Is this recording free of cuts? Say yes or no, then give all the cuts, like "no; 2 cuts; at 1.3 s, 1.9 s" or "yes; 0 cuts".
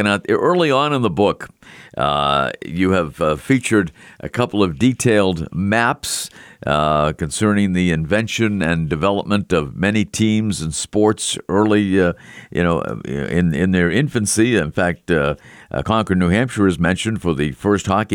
yes; 0 cuts